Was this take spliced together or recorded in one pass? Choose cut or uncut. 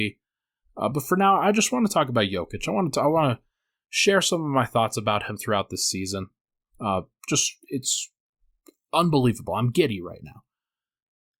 uncut